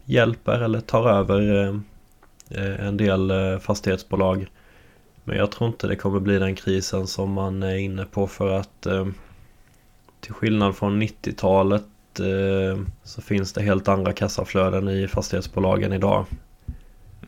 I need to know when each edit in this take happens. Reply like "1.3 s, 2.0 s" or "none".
13.0 s